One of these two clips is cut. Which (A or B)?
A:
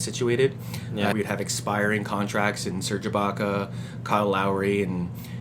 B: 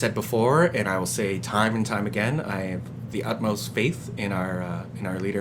A